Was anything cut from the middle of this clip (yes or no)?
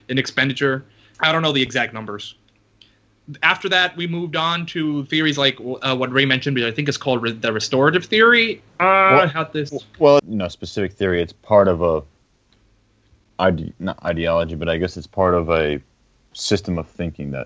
yes